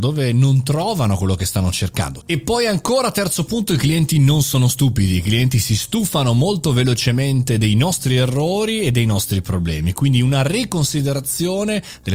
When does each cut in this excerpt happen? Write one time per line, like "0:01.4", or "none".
0:02.2